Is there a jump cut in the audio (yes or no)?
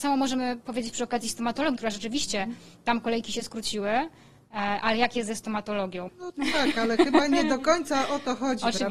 yes